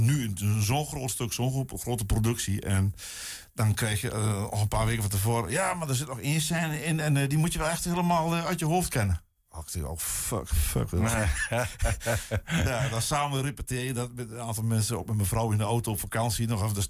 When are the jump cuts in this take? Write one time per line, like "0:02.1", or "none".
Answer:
none

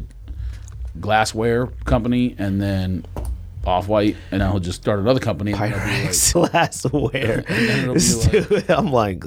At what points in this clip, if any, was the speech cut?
0:04.4
0:06.3

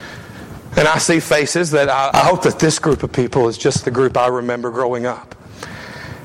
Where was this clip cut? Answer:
0:02.1
0:03.8

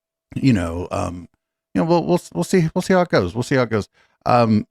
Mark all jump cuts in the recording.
none

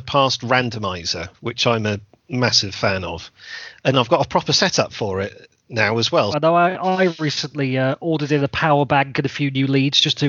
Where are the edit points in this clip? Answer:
0:06.3

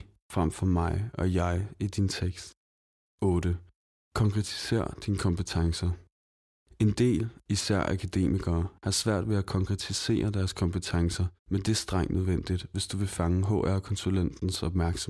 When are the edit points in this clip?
0:11.4

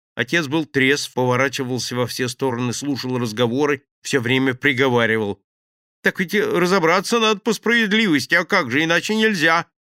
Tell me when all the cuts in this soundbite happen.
0:01.1

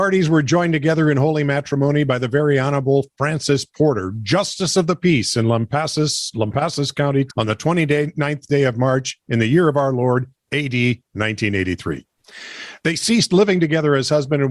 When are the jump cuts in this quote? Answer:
0:07.3

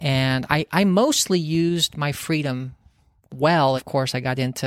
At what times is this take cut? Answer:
0:03.8

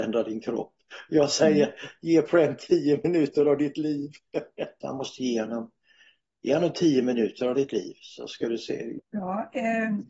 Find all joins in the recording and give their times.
0:04.8
0:09.0

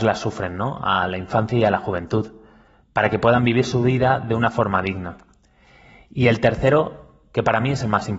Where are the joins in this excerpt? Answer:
none

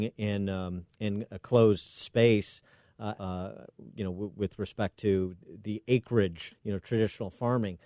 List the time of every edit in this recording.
0:03.2
0:06.5

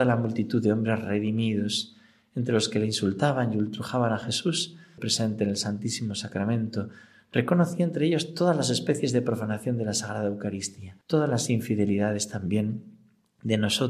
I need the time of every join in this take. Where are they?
0:05.0
0:11.0

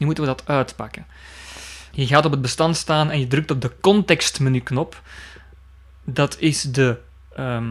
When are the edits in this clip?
0:01.9

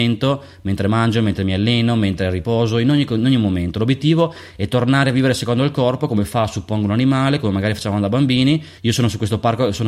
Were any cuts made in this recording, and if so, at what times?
0:08.8

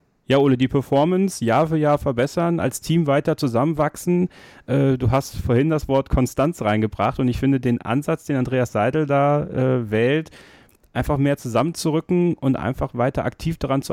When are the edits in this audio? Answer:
none

